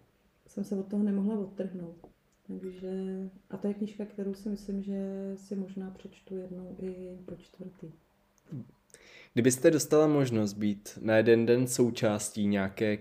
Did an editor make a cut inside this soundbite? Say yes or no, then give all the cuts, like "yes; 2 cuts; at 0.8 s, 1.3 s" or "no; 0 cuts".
no; 0 cuts